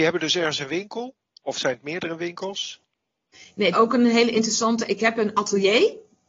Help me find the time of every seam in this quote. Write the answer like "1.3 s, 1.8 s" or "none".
3.7 s